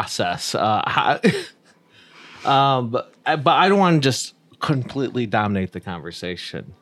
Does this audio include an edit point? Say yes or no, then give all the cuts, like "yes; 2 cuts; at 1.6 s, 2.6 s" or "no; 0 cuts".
no; 0 cuts